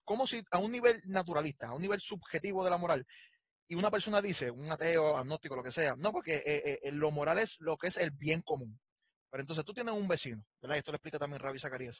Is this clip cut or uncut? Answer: uncut